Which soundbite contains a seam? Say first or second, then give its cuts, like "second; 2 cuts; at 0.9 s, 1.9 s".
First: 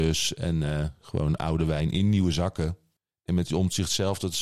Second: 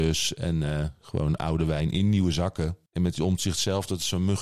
second; 1 cut; at 2.9 s